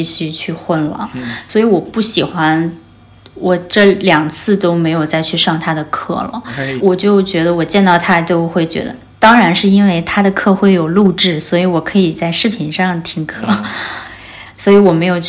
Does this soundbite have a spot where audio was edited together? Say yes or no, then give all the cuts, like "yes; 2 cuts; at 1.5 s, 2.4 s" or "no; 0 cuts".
yes; 1 cut; at 6.8 s